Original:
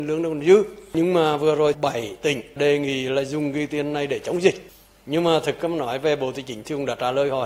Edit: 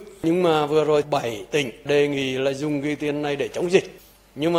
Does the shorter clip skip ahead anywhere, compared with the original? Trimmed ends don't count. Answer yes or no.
no